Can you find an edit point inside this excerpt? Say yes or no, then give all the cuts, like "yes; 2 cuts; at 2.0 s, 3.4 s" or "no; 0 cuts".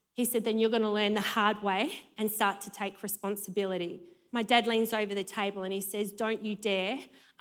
yes; 1 cut; at 4.3 s